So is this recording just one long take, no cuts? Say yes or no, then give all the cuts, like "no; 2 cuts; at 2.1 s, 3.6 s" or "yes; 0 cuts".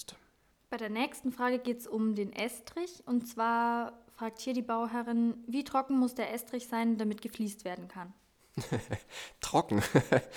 yes; 0 cuts